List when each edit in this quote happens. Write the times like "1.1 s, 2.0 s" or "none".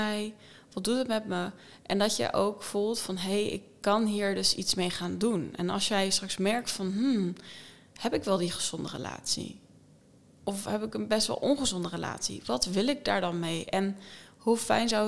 none